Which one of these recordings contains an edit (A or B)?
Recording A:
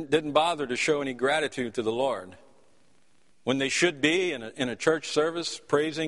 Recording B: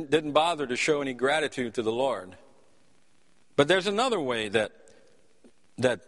A